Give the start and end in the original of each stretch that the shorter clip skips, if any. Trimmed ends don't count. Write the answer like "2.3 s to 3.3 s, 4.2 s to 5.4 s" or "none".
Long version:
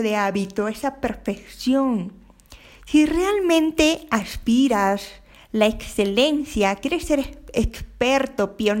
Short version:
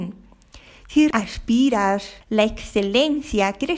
3.1 s to 4.1 s, 5.2 s to 5.4 s